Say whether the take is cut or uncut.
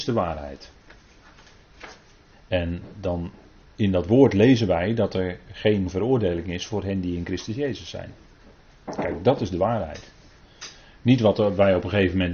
cut